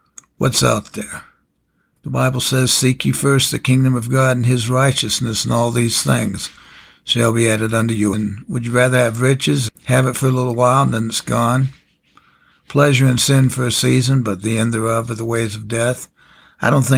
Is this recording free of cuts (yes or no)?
no